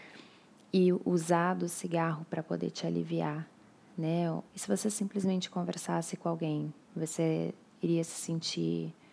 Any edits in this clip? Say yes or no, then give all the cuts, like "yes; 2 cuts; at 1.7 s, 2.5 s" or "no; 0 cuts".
yes; 1 cut; at 4.5 s